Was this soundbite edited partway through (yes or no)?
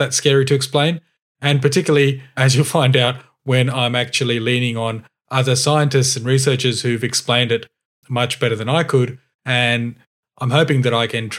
yes